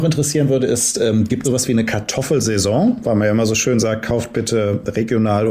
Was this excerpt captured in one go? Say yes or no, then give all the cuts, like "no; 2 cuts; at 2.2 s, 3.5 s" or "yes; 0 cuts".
no; 1 cut; at 1.4 s